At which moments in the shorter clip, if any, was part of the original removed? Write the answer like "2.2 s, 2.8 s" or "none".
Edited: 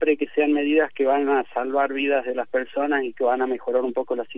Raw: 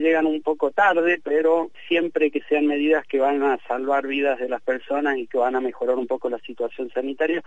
none